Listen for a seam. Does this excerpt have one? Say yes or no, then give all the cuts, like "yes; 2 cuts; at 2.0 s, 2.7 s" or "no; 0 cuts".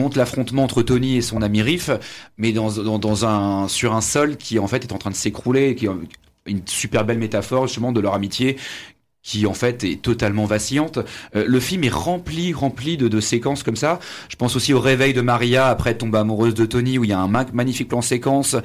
no; 0 cuts